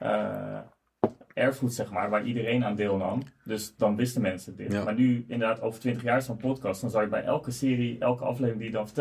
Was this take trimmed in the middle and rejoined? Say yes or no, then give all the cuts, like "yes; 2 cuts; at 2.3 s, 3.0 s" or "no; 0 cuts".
no; 0 cuts